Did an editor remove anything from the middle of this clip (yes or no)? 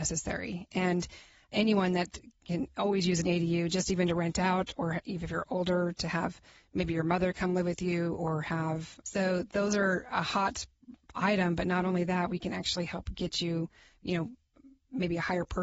yes